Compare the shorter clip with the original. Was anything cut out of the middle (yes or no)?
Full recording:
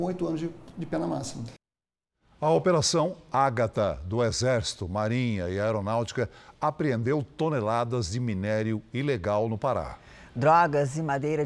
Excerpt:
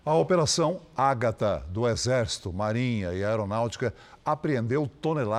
no